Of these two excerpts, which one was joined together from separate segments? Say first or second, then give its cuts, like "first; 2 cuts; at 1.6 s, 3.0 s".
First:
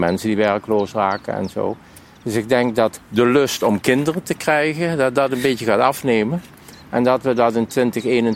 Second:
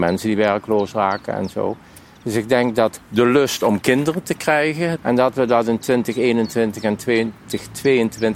second; 1 cut; at 5.0 s